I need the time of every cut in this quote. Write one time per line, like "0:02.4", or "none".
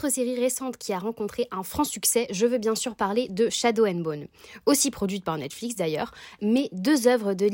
0:06.4